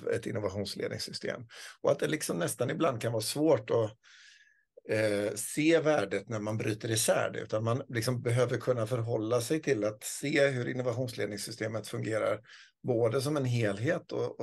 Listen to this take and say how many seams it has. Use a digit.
0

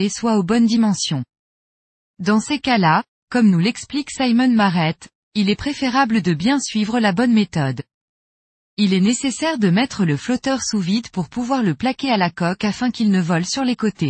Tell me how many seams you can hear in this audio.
0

